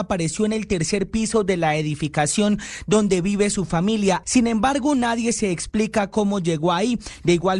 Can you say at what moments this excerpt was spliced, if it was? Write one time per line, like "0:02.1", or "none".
0:04.2